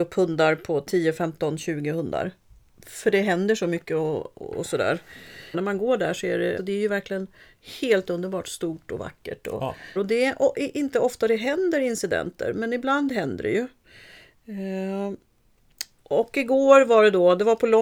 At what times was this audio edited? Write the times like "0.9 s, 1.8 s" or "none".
5.5 s, 6.6 s, 10.0 s